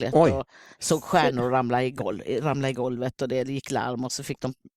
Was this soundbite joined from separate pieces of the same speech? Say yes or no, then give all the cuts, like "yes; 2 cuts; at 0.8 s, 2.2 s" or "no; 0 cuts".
no; 0 cuts